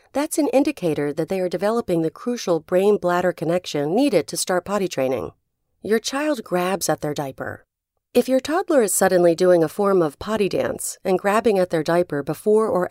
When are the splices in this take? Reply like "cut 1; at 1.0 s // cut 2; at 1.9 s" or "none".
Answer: cut 1; at 5.7 s